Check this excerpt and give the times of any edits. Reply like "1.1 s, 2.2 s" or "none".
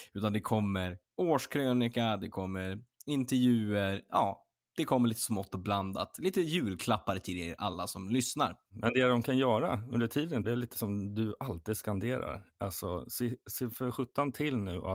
10.4 s